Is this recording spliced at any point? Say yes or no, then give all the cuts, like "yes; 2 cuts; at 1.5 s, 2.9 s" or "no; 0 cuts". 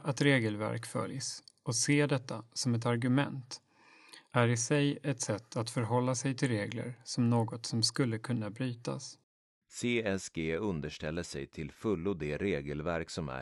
yes; 1 cut; at 9.6 s